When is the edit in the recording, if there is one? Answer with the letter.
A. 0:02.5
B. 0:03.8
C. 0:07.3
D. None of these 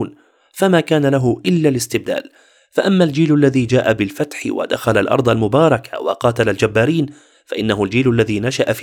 D